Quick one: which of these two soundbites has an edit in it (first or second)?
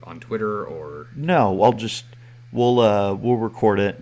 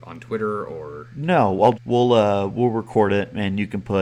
second